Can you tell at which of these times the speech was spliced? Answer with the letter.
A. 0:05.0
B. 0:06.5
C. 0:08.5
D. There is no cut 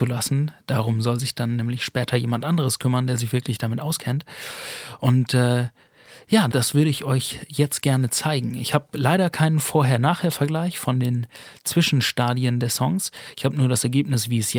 B